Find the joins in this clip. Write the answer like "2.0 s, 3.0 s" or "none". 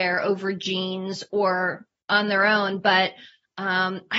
none